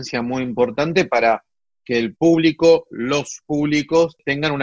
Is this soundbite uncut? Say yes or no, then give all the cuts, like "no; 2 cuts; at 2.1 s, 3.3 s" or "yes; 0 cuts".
yes; 0 cuts